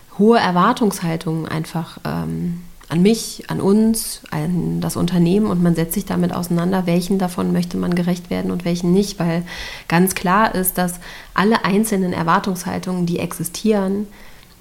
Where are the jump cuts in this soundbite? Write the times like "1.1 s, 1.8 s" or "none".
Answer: none